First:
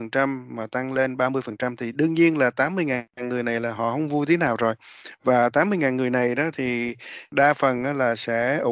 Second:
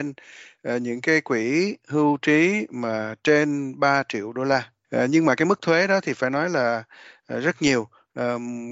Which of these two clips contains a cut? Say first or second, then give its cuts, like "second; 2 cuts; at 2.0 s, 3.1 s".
second; 1 cut; at 4.8 s